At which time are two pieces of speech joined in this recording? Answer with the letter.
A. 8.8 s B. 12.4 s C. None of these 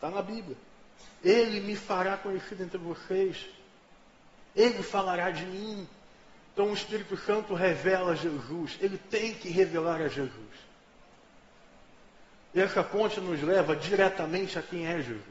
B